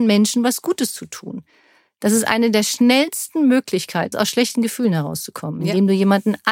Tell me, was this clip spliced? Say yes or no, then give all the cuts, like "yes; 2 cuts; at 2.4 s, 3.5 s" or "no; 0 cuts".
yes; 1 cut; at 4.1 s